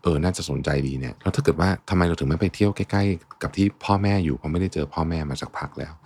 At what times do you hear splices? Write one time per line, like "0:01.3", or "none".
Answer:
0:01.2